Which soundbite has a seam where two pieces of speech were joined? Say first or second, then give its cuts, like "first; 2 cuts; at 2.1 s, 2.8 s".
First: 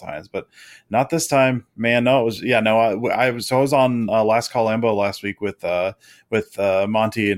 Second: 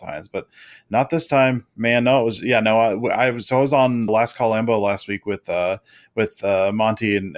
second; 1 cut; at 4.1 s